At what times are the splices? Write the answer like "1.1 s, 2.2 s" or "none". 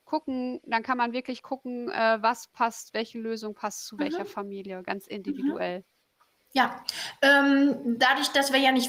none